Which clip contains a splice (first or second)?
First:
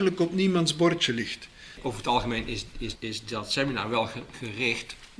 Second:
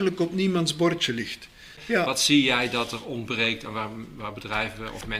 first